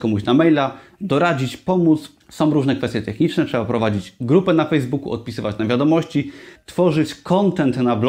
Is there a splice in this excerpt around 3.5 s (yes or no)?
no